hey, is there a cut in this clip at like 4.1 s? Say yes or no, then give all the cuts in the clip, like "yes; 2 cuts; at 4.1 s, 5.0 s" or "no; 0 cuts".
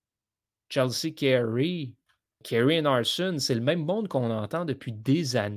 no; 1 cut; at 2.4 s